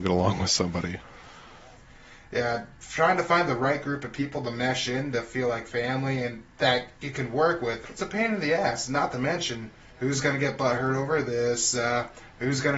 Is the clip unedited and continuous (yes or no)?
no